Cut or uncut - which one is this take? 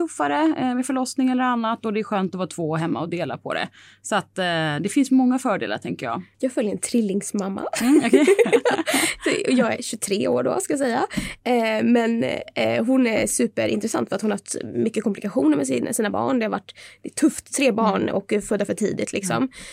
cut